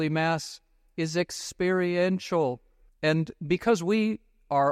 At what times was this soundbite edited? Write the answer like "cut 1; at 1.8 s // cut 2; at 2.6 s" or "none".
cut 1; at 2.9 s

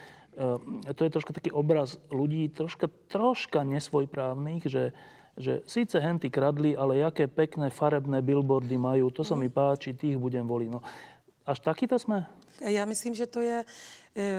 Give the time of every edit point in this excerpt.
cut 1; at 12.6 s

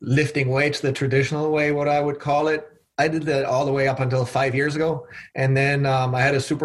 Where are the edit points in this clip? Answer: none

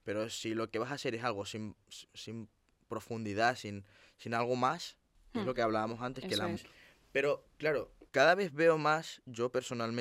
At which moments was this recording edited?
cut 1; at 6.6 s // cut 2; at 8.1 s

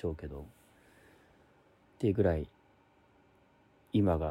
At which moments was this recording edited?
cut 1; at 1.8 s

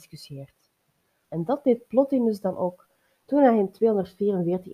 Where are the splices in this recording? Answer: cut 1; at 1.2 s

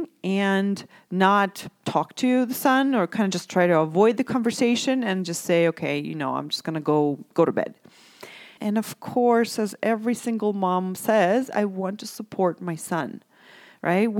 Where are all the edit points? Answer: cut 1; at 8.6 s

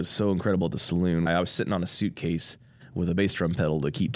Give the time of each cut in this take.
cut 1; at 1.3 s

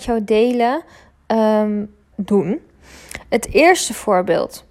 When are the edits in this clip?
cut 1; at 2.1 s

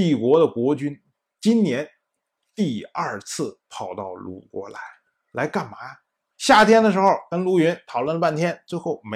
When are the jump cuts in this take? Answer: cut 1; at 6.3 s

